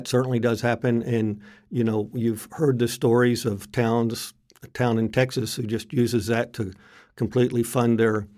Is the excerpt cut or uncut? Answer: uncut